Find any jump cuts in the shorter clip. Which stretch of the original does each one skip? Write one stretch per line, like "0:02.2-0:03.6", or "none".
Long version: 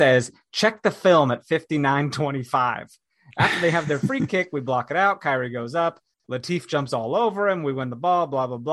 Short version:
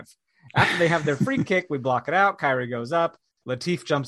none